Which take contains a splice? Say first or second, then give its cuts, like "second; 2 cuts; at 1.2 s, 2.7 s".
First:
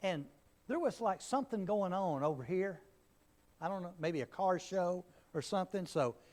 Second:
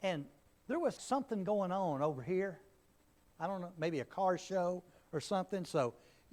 second; 1 cut; at 1.0 s